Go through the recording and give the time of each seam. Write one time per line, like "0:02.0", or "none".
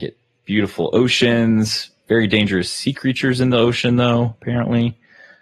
none